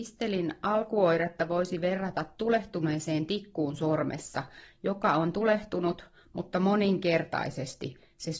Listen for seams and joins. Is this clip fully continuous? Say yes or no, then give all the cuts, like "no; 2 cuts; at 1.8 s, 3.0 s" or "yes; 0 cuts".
yes; 0 cuts